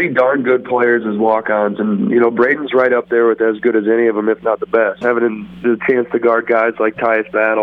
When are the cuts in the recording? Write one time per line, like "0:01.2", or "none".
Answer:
0:05.0